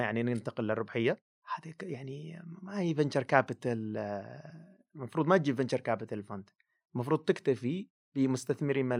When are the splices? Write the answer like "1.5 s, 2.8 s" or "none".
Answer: none